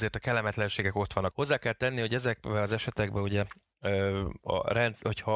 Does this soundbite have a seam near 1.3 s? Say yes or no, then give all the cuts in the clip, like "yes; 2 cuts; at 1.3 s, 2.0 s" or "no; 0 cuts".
yes; 1 cut; at 1.3 s